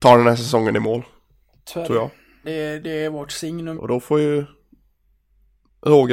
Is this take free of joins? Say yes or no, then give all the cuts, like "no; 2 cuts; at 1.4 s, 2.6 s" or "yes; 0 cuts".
no; 2 cuts; at 2.4 s, 3.7 s